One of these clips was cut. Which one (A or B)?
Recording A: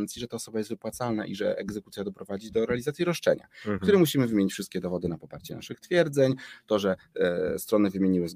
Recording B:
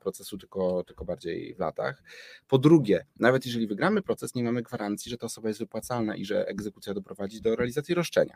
A